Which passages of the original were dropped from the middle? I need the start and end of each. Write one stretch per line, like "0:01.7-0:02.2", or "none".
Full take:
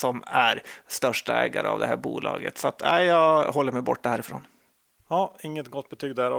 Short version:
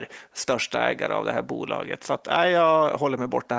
none